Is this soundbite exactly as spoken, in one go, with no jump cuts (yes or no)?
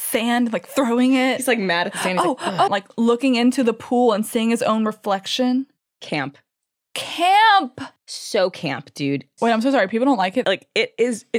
no